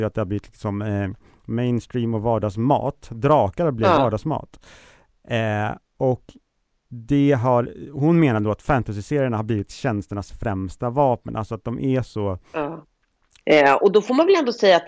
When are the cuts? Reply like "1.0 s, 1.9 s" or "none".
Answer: 13.4 s